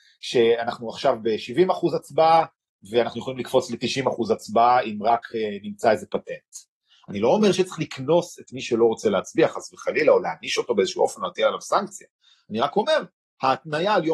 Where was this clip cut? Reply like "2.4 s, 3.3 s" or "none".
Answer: none